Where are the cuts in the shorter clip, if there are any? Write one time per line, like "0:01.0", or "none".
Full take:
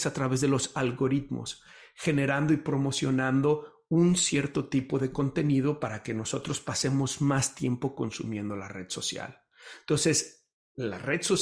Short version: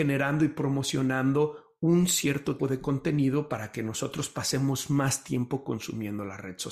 0:02.6